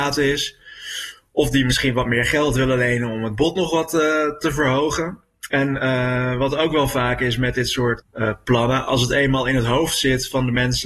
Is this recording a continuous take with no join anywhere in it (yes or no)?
no